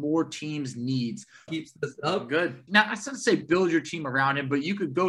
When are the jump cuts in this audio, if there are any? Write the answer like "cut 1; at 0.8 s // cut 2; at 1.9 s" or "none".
cut 1; at 1.5 s // cut 2; at 2.7 s